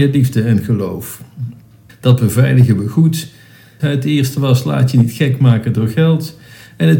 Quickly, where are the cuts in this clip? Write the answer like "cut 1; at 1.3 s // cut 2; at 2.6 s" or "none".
cut 1; at 1.9 s // cut 2; at 3.8 s